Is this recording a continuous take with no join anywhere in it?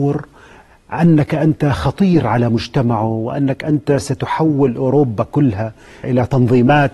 no; 1 cut; at 6.0 s

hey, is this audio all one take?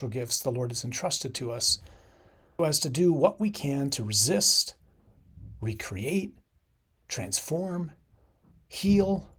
no; 1 cut; at 2.6 s

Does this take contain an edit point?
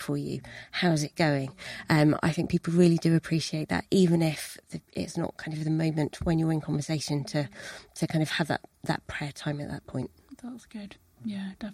no; 0 cuts

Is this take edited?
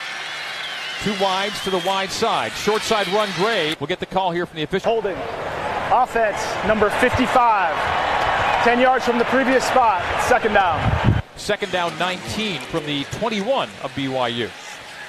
yes; 3 cuts; at 3.7 s, 4.8 s, 12.6 s

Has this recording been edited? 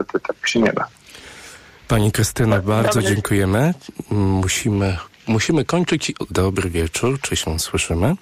yes; 1 cut; at 6.3 s

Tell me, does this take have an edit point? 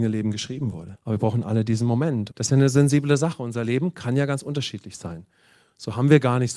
yes; 2 cuts; at 0.9 s, 2.3 s

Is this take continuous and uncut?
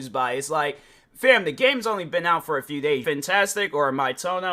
no; 1 cut; at 3.0 s

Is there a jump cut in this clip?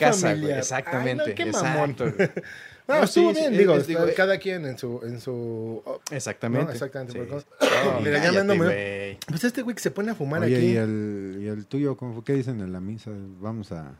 yes; 3 cuts; at 6.0 s, 7.4 s, 12.0 s

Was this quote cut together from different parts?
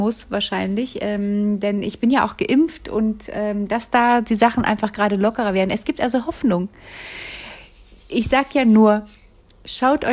no; 0 cuts

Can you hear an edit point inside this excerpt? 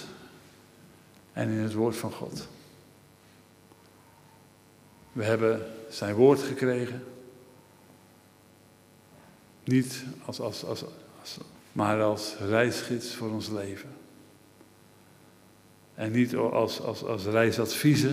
yes; 1 cut; at 11.6 s

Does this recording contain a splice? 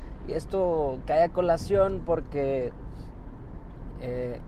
no; 0 cuts

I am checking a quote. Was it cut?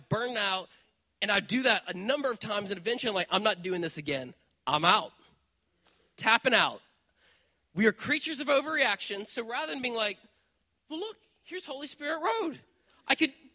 no; 0 cuts

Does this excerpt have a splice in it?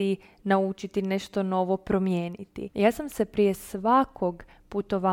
yes; 1 cut; at 2.7 s

